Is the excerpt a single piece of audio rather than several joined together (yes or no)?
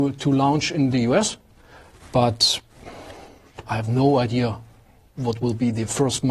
yes